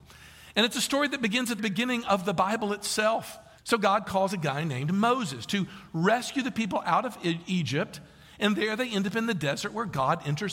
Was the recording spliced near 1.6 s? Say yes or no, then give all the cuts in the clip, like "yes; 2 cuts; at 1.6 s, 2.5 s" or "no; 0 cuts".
yes; 2 cuts; at 1.6 s, 3.6 s